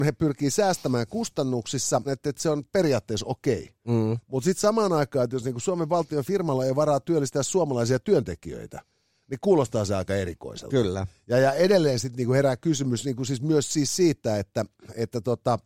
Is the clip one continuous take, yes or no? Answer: no